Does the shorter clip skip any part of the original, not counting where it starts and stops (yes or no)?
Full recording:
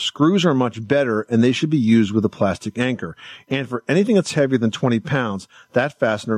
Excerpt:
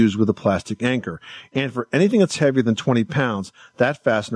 no